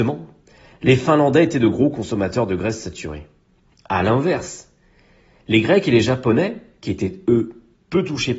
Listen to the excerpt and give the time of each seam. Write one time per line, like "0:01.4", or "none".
none